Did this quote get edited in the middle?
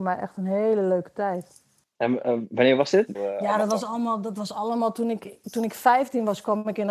yes; 2 cuts; at 3.1 s, 5.4 s

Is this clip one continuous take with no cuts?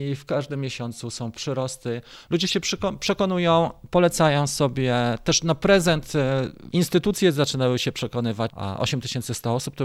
no; 2 cuts; at 6.7 s, 8.5 s

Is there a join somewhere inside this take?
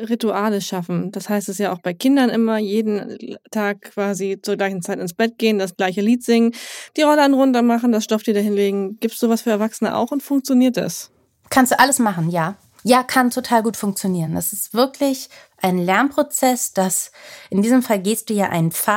no; 0 cuts

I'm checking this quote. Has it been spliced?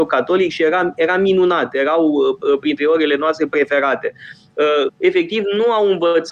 yes; 1 cut; at 4.9 s

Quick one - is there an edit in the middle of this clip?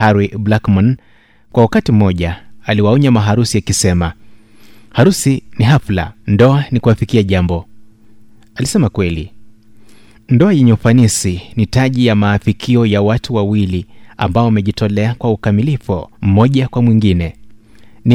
yes; 2 cuts; at 6.2 s, 16.1 s

